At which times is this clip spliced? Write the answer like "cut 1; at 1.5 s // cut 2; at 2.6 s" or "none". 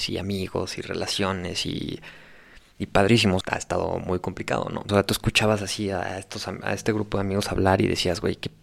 cut 1; at 3.4 s // cut 2; at 4.9 s